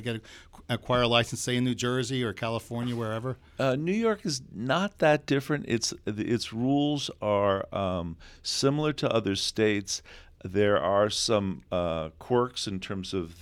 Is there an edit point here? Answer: no; 0 cuts

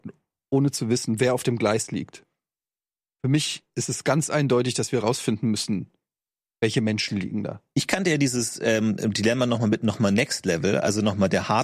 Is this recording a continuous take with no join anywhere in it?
yes; 0 cuts

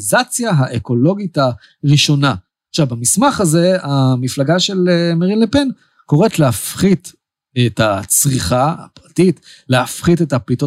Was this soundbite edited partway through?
no; 0 cuts

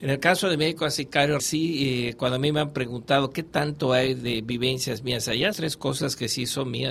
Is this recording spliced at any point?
yes; 2 cuts; at 1.4 s, 5.5 s

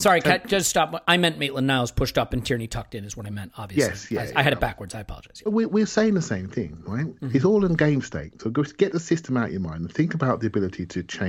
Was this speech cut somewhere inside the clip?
yes; 1 cut; at 1.0 s

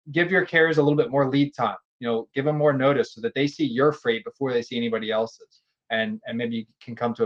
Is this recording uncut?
yes; 0 cuts

